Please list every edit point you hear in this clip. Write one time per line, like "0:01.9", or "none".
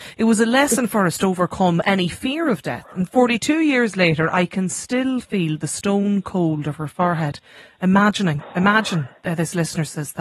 none